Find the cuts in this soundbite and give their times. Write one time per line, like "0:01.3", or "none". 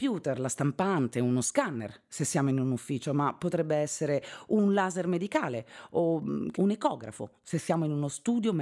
0:06.5